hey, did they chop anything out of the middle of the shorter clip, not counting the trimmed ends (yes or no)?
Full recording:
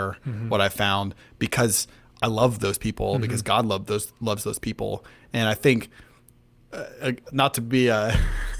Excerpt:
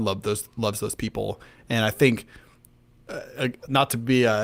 no